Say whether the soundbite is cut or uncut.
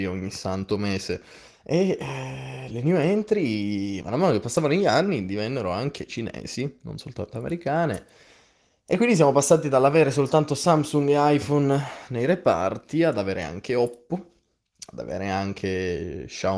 uncut